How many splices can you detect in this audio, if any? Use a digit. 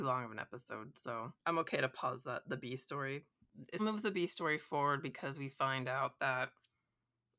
2